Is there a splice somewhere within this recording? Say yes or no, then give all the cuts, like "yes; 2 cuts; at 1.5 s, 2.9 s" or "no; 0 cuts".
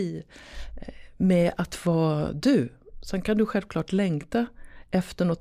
no; 0 cuts